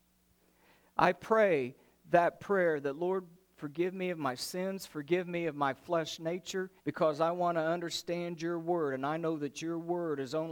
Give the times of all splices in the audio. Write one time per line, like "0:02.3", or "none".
0:06.8

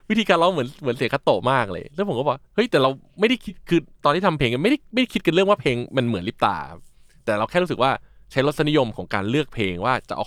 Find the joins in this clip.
0:02.5

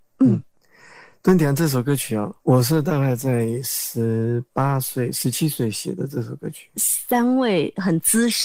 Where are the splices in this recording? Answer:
0:02.4
0:06.7

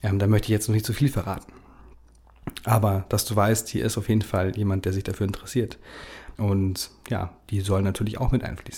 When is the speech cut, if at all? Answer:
0:06.4

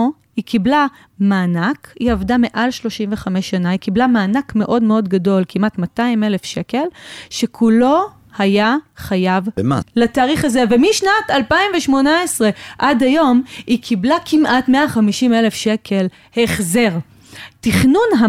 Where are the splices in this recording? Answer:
0:09.8

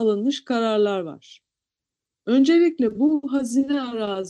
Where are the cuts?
none

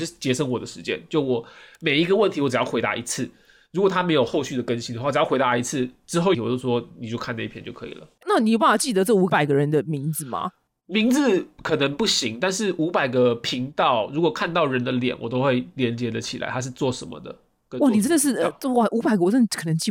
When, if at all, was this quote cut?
0:06.3

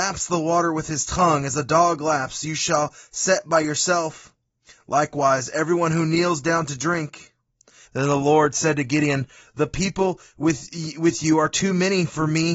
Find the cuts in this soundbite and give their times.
0:07.9

